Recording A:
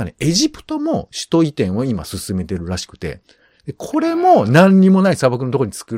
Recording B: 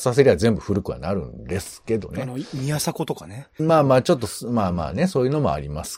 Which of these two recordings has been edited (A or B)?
B